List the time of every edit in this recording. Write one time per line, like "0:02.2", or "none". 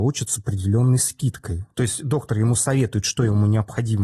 0:01.7